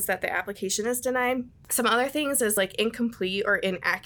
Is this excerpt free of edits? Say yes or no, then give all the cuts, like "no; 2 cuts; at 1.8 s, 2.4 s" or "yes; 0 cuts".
yes; 0 cuts